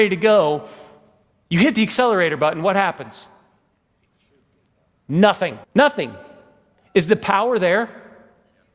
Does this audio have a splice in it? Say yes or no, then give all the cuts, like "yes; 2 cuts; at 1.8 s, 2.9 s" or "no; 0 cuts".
yes; 1 cut; at 5.6 s